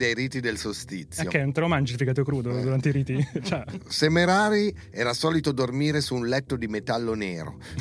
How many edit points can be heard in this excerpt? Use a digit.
0